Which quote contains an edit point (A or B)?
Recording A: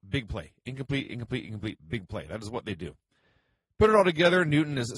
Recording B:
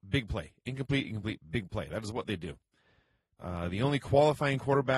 B